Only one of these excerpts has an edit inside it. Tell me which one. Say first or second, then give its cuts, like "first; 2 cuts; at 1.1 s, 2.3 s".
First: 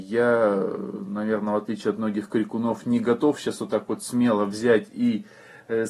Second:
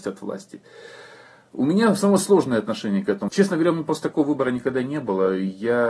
second; 1 cut; at 3.3 s